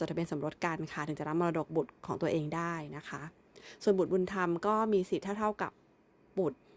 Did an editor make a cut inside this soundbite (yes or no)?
no